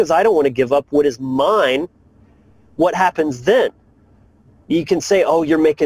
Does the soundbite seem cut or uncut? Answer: uncut